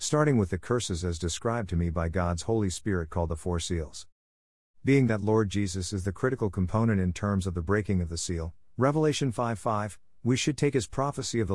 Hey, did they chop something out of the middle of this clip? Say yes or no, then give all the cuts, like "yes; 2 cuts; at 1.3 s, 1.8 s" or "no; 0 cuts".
no; 0 cuts